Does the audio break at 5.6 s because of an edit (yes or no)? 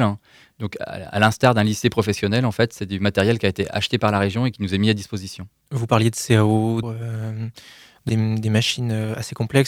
no